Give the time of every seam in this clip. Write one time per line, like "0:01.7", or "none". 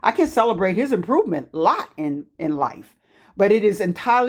0:02.3